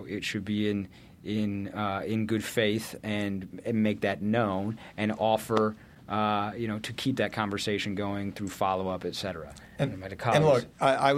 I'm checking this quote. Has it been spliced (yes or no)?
no